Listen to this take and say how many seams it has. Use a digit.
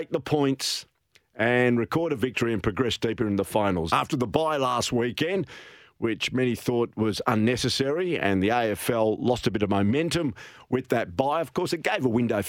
1